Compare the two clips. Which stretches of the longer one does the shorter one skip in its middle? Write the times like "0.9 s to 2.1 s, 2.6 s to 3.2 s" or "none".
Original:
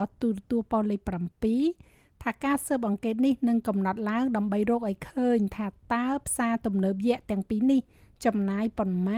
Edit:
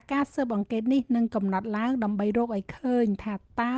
none